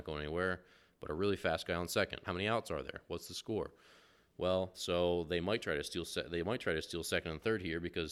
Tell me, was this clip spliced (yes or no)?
yes